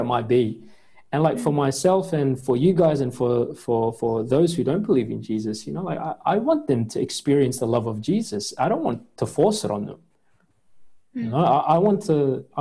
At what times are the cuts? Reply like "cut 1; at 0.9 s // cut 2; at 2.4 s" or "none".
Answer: none